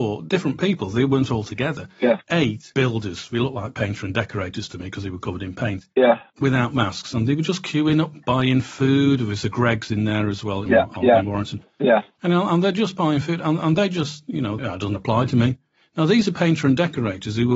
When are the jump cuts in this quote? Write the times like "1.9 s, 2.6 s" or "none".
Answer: 10.7 s, 14.6 s